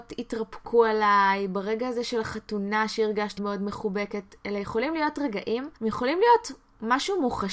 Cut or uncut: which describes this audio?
cut